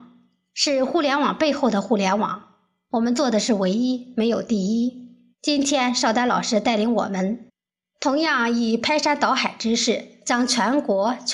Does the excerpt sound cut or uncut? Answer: cut